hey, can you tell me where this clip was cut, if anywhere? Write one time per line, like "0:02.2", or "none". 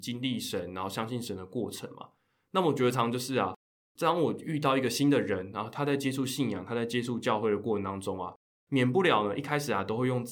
0:02.9